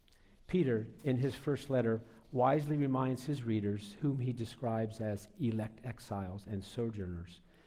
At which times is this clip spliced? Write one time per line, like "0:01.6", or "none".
none